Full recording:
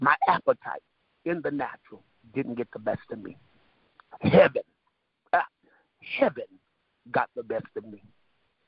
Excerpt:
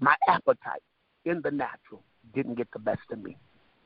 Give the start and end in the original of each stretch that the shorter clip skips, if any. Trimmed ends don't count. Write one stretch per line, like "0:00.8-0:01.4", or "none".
none